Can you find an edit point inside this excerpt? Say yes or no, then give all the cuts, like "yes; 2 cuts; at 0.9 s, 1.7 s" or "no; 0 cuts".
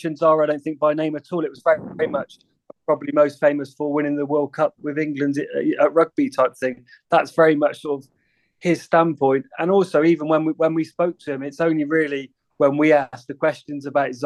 no; 0 cuts